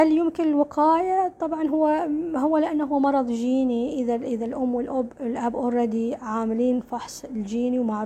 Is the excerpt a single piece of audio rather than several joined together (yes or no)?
yes